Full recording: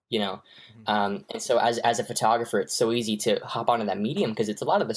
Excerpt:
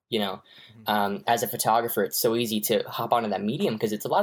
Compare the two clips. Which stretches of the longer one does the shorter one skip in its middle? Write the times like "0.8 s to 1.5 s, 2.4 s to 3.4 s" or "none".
1.3 s to 1.8 s